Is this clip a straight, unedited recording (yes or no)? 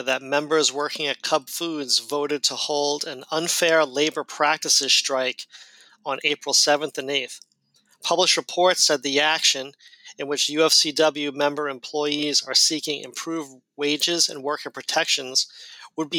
yes